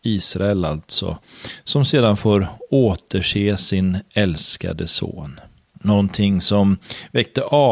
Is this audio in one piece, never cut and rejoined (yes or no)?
no